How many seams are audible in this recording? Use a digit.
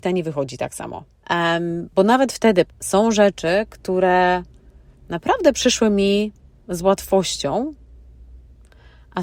2